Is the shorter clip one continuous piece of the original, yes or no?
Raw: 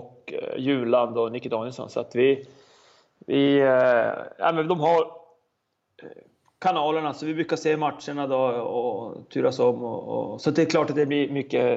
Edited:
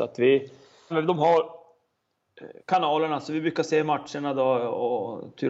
no